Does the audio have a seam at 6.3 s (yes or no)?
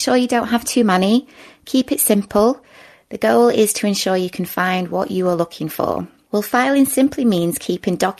yes